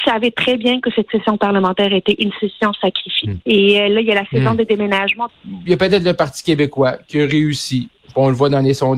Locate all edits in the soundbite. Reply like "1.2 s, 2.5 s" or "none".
3.4 s, 5.3 s